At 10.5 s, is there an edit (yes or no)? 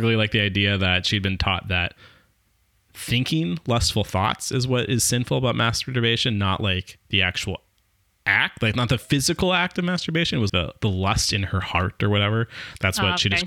yes